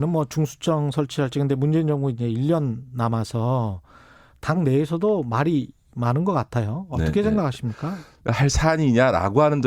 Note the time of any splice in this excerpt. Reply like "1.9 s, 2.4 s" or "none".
8.2 s